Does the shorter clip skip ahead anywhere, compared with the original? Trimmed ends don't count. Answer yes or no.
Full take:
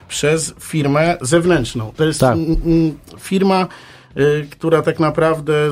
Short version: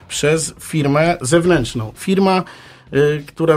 yes